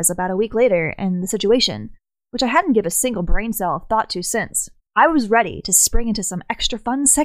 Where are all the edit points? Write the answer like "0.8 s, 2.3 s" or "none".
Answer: 4.9 s